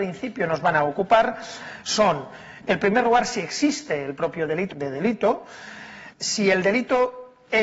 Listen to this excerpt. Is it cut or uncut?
cut